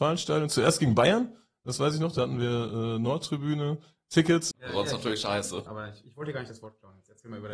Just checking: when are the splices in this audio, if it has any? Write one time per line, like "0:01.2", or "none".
0:04.5
0:05.7

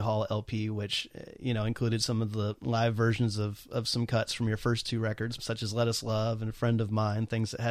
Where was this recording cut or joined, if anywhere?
0:05.4

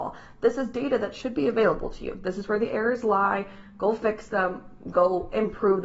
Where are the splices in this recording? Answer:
none

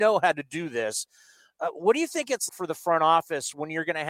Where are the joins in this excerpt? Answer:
0:02.5

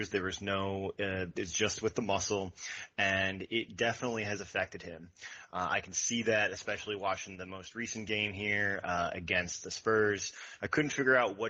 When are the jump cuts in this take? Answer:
0:10.6

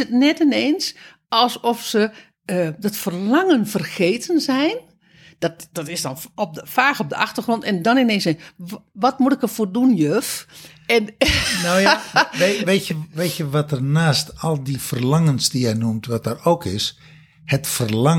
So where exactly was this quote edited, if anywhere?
none

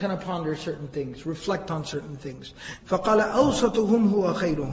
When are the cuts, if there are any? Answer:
0:02.8

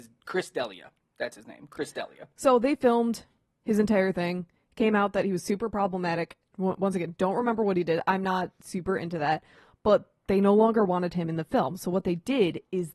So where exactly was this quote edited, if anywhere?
none

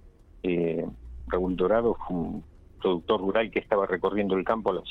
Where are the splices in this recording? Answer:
none

